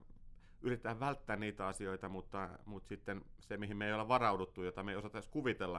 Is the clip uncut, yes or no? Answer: yes